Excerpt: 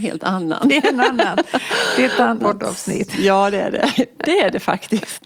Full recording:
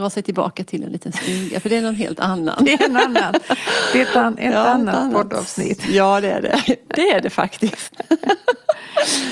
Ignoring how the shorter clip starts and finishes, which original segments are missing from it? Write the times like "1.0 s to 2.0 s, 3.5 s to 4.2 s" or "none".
4.4 s to 5.1 s